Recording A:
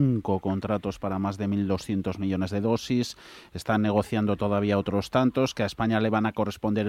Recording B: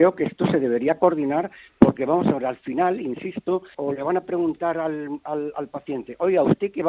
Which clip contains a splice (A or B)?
B